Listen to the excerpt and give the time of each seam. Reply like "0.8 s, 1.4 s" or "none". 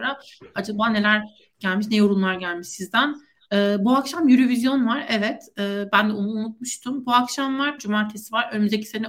7.8 s